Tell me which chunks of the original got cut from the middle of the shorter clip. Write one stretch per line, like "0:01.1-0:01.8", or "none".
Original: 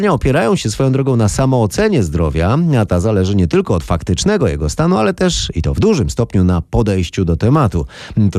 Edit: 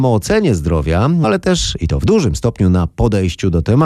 0:02.7-0:05.0